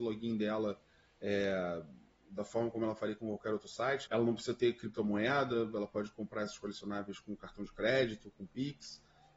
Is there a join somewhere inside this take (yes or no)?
yes